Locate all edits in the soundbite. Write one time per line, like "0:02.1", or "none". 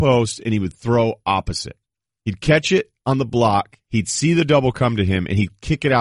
none